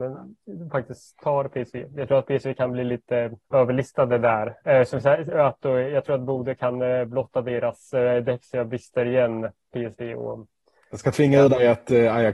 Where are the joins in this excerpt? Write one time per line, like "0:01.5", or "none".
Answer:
0:03.4